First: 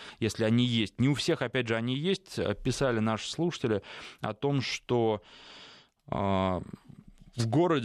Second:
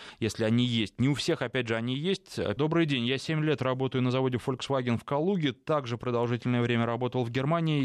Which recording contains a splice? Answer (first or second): second